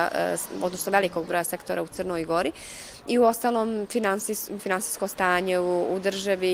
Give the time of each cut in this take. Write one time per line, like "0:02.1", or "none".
0:04.6